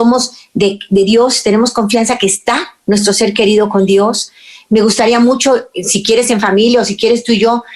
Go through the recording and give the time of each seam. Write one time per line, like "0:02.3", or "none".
0:05.7